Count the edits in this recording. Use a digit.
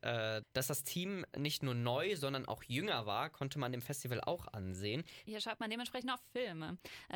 1